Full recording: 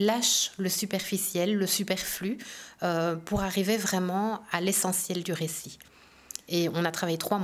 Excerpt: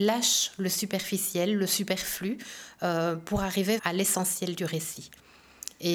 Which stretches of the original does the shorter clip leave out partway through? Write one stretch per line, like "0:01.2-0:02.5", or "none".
0:03.8-0:04.5